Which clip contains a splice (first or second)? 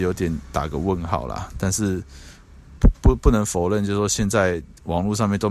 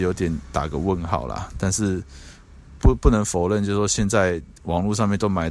second